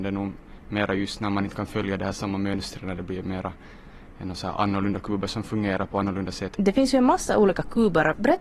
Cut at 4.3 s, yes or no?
no